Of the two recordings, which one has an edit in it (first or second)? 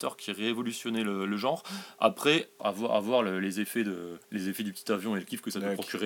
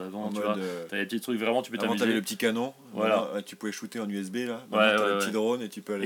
first